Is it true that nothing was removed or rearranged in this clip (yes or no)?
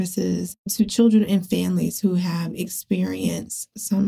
yes